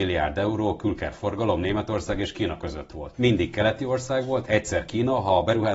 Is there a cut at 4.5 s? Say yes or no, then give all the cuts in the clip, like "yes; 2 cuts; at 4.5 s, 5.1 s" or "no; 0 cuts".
yes; 2 cuts; at 3.1 s, 4.5 s